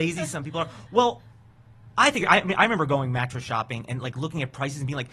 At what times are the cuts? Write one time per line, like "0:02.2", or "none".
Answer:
none